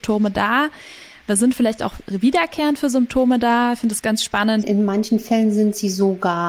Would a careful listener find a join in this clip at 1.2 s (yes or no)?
no